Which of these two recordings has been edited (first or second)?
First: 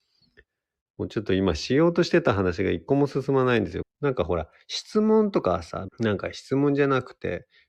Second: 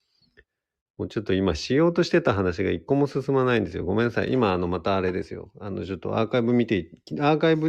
first